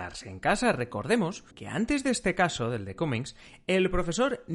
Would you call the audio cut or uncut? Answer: cut